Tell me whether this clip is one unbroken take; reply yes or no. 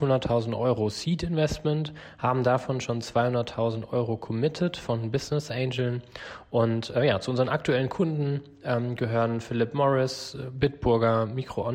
yes